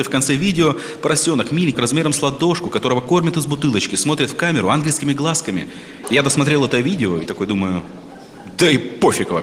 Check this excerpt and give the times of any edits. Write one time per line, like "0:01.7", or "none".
0:01.7
0:06.0